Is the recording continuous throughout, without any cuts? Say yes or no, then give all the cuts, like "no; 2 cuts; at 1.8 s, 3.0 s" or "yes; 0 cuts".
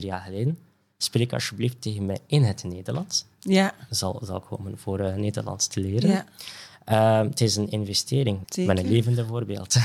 no; 2 cuts; at 3.9 s, 8.4 s